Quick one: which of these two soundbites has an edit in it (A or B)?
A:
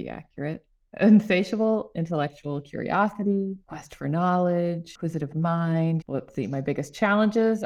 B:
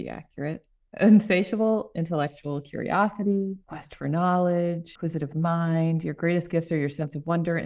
A